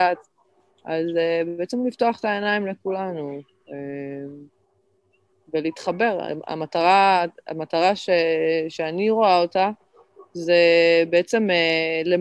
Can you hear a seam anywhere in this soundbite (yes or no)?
no